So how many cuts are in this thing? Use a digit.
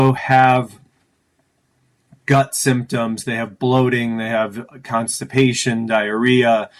0